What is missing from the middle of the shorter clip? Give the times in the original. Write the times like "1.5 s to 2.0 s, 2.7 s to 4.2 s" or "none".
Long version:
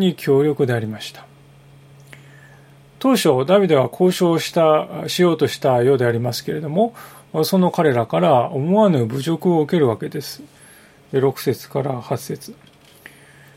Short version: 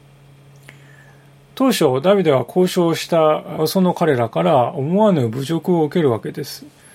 5.0 s to 7.4 s

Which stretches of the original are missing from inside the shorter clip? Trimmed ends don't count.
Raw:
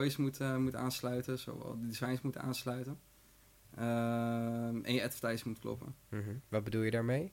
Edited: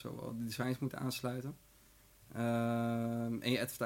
none

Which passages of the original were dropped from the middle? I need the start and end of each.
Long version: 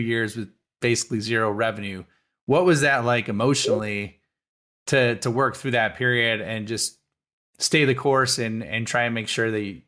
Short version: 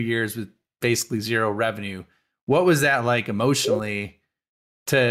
none

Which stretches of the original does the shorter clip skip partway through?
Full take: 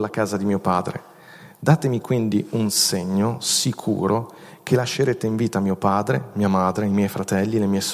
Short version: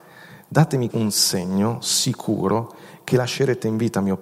2.0 s to 2.5 s

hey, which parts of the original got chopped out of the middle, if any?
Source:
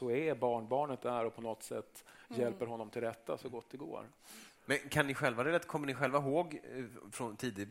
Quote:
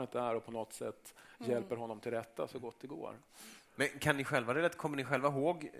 none

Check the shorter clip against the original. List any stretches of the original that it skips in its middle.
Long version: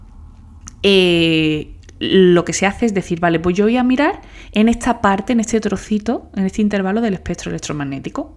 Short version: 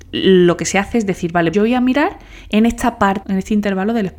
3.4 s to 3.6 s, 5.2 s to 6.3 s

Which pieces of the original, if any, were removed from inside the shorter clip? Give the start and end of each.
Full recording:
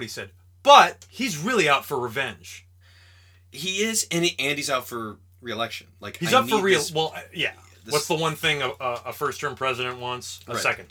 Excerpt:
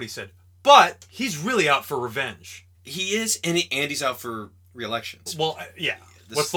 2.7 s to 3.4 s, 5.9 s to 6.8 s

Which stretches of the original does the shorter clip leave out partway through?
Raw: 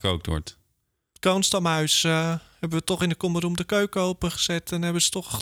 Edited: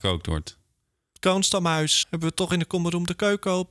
2.0 s to 2.5 s

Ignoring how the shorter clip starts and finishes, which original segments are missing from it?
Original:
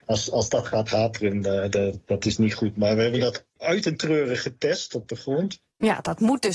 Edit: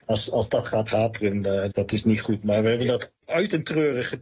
1.7 s to 2.0 s

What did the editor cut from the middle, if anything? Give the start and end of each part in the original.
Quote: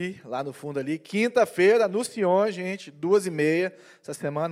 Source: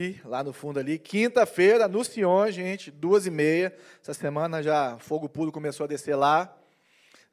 none

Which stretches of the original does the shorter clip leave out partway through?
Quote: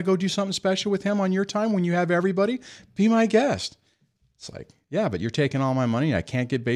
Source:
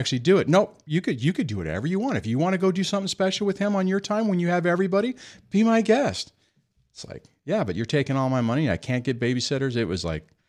none

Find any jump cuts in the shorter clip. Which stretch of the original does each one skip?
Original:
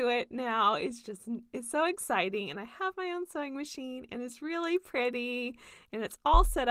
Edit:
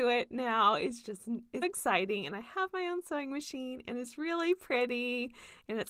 1.6 s to 1.9 s

